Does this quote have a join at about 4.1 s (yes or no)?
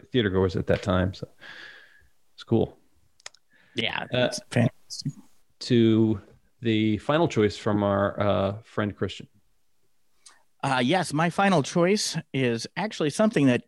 no